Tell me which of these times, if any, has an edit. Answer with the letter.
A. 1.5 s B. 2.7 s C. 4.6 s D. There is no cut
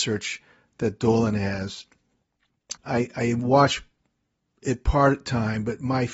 B